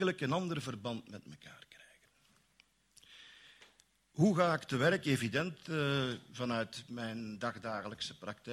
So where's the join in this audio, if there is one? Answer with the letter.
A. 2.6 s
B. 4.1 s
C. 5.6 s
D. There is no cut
D